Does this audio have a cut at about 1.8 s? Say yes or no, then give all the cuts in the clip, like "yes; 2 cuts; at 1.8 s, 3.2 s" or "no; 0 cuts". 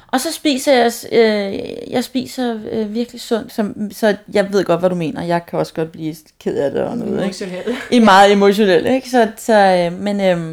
no; 1 cut; at 3.5 s